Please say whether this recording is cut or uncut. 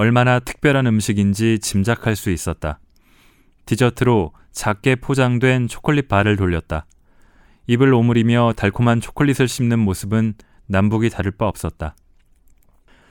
uncut